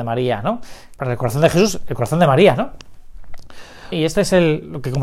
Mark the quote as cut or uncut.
cut